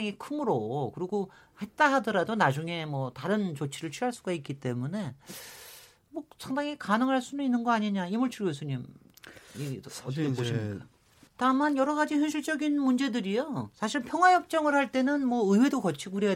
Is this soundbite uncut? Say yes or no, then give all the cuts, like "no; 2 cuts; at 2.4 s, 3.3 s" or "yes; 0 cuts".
no; 1 cut; at 11.3 s